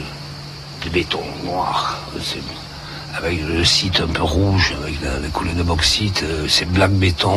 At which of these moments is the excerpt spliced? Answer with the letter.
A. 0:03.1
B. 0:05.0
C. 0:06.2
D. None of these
D